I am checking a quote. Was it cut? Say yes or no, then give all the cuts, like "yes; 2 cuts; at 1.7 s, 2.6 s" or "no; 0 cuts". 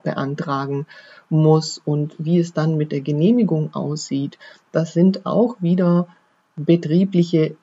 no; 0 cuts